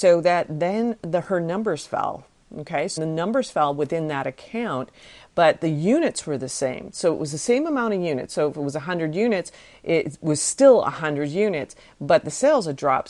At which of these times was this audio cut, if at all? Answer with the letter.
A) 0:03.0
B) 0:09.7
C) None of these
A